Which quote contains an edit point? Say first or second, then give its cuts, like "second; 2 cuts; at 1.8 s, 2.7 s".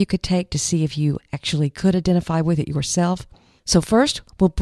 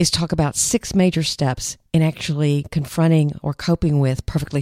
first; 1 cut; at 3.6 s